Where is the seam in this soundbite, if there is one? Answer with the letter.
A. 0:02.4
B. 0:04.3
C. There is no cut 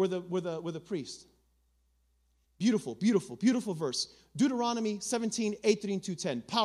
A